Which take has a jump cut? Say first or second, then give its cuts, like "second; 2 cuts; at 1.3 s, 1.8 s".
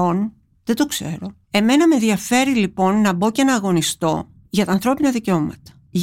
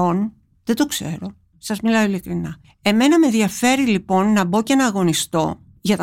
first; 1 cut; at 1.4 s